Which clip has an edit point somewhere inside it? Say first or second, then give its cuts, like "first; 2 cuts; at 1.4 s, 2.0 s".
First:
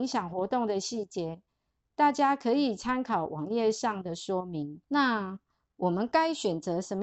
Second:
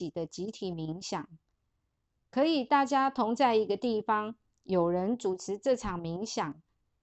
first; 1 cut; at 4.8 s